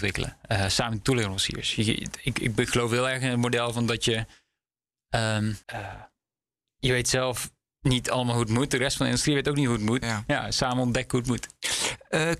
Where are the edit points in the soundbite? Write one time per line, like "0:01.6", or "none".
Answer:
0:05.6
0:10.0